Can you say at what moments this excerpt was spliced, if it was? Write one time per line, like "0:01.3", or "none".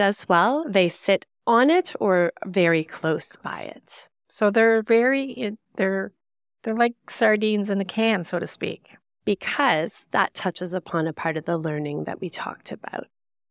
none